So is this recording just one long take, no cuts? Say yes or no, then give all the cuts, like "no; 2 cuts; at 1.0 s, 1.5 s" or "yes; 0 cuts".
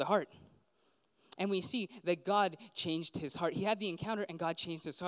no; 1 cut; at 1.4 s